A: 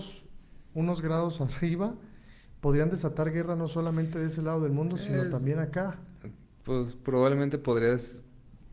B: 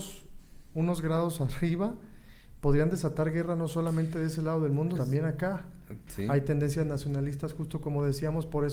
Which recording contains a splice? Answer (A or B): B